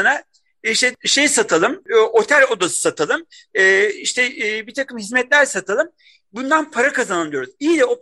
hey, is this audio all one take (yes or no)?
yes